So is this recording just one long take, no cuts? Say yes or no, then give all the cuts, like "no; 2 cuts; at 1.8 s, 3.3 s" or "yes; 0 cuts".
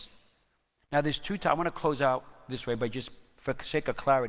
yes; 0 cuts